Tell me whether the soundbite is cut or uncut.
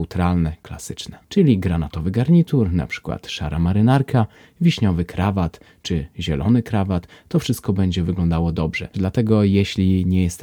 cut